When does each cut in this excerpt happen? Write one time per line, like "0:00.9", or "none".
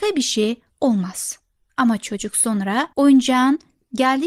0:01.7
0:02.9